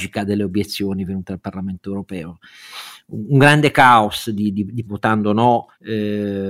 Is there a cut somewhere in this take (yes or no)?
yes